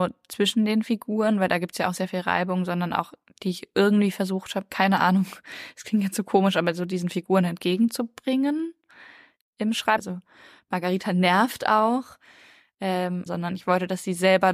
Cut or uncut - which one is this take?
cut